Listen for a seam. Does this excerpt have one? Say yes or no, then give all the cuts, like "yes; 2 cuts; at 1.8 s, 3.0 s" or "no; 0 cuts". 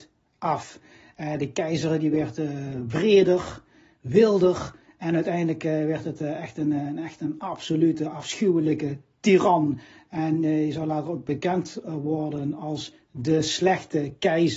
no; 0 cuts